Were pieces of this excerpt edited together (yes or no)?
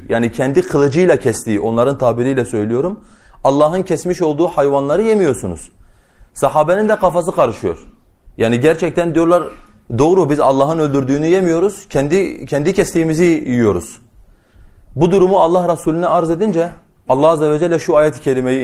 no